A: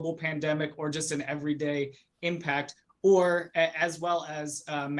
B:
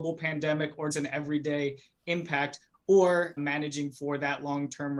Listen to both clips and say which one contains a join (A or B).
B